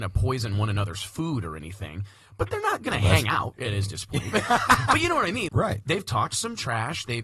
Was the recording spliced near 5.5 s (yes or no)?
yes